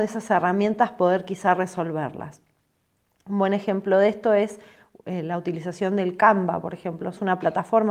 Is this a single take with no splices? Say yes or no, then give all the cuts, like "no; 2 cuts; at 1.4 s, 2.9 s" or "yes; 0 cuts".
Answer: yes; 0 cuts